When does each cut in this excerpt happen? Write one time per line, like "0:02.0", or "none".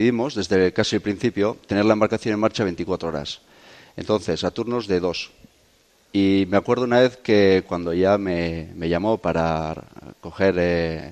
none